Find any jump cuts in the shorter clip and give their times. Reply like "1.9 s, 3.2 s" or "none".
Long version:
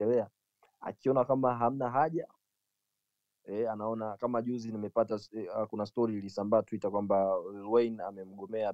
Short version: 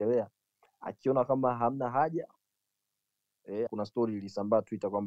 3.7 s